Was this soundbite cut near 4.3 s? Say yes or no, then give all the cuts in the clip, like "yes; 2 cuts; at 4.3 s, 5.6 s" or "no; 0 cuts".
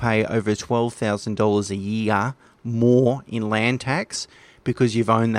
no; 0 cuts